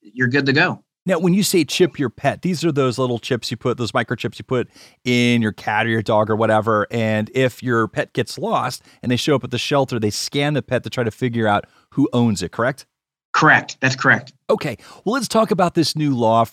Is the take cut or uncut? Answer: uncut